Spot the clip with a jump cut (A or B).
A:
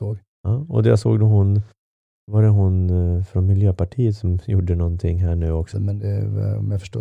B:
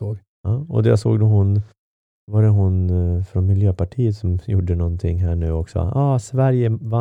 A